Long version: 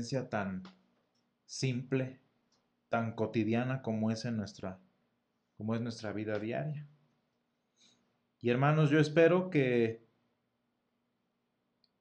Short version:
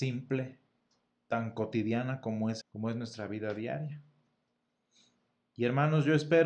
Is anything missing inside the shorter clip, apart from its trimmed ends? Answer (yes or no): yes